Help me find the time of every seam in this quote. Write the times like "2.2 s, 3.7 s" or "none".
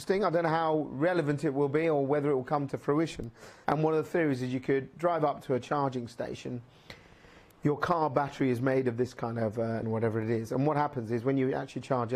3.6 s, 9.8 s